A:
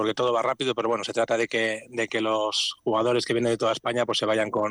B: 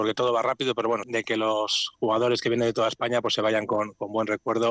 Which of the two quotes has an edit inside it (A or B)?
B